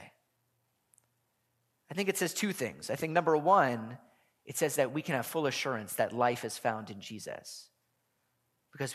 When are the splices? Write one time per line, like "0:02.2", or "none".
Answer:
none